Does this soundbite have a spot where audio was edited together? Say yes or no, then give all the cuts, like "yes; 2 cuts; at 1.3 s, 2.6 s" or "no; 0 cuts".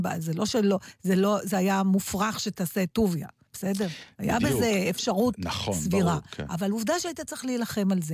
no; 0 cuts